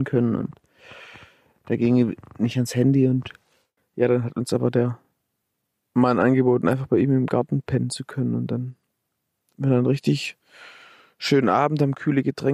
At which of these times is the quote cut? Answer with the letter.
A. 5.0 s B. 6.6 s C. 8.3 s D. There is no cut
D